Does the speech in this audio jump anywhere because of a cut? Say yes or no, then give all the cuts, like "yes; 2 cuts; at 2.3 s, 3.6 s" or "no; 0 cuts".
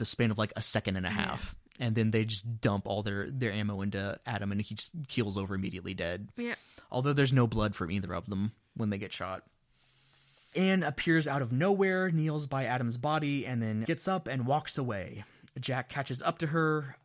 yes; 1 cut; at 13.8 s